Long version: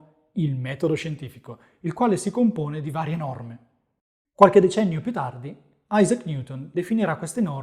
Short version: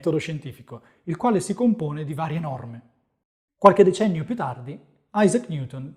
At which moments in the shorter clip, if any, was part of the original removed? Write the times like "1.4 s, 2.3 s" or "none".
none